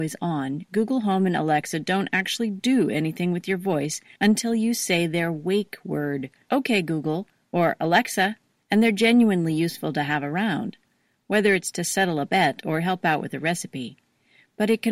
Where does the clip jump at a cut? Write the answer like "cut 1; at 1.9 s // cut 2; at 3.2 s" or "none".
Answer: cut 1; at 6.4 s // cut 2; at 8.6 s